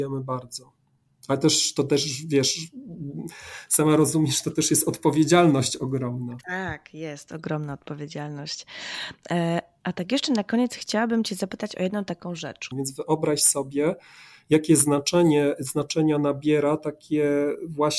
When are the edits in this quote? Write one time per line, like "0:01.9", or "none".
0:12.7